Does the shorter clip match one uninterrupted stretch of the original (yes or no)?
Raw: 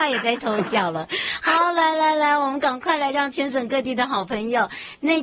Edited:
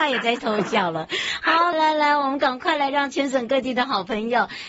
no